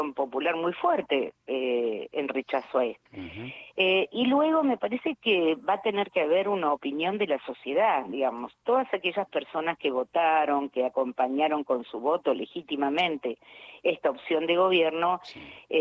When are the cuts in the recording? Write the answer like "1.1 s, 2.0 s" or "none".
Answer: 3.1 s